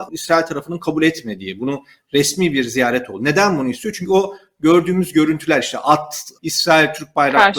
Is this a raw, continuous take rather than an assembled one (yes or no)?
no